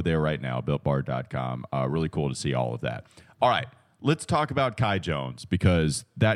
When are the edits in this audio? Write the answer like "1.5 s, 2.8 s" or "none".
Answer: none